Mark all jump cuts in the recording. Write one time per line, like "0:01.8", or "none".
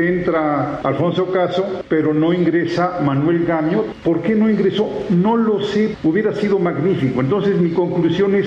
0:04.0

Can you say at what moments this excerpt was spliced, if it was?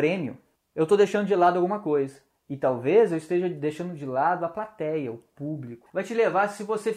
0:05.9

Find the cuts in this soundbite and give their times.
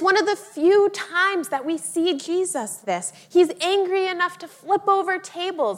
0:02.8

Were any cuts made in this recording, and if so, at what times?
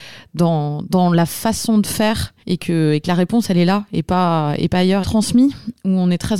0:02.4
0:05.0

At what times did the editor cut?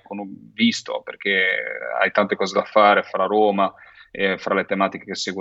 none

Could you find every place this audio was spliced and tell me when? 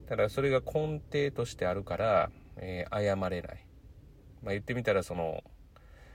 none

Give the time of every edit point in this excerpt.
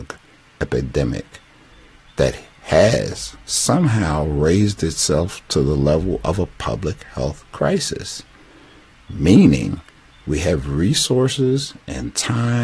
none

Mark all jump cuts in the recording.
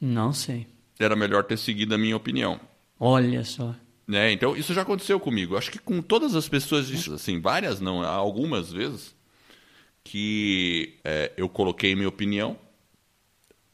0:07.1
0:11.0

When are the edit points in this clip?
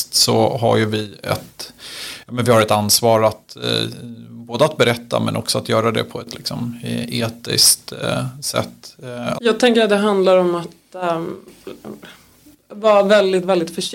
0:09.3

